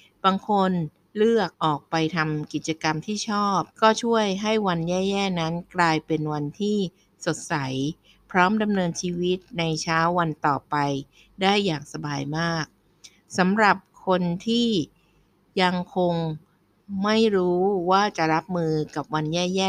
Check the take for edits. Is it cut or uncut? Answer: cut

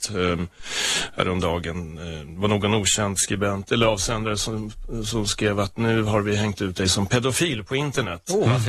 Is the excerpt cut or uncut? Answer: uncut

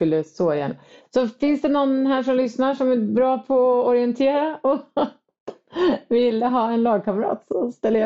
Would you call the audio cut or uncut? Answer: uncut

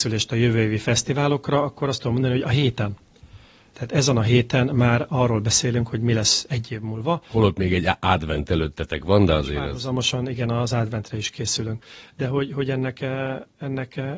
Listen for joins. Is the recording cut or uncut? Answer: uncut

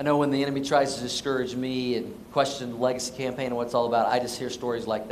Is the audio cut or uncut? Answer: cut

